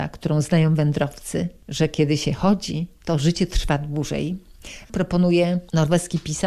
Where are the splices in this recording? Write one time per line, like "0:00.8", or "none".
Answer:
0:04.8